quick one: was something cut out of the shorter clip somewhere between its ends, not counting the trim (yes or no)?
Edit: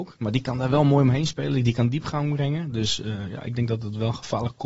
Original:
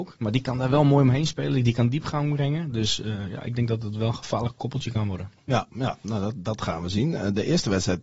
no